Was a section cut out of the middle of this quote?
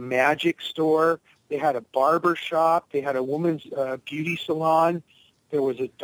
no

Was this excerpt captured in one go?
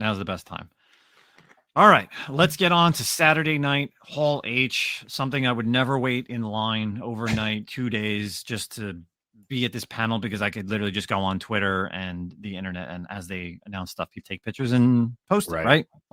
no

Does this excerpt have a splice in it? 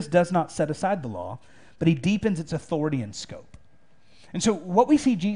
no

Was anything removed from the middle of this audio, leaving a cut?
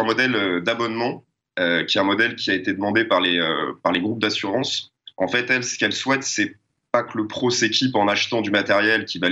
no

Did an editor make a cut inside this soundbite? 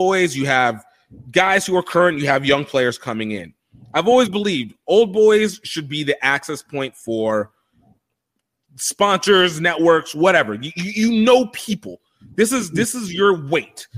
no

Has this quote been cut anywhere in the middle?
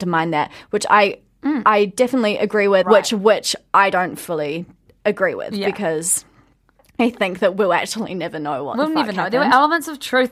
yes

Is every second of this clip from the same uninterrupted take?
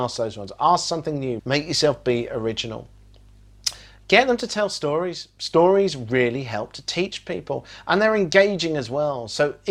no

